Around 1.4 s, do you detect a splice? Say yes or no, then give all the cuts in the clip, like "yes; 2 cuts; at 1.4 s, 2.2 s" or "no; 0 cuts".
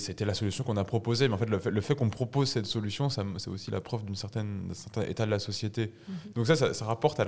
no; 1 cut; at 6.3 s